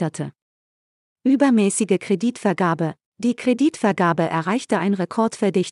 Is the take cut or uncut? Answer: cut